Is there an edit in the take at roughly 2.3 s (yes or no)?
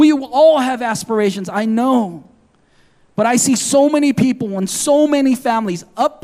no